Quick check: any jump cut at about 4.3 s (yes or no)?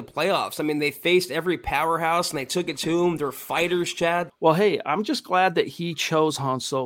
yes